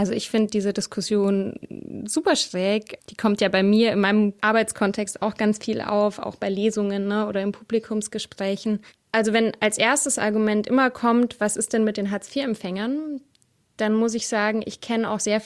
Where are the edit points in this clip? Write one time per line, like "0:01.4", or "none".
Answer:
none